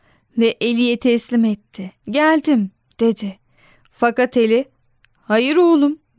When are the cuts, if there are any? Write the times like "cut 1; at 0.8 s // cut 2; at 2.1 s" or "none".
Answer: cut 1; at 2.0 s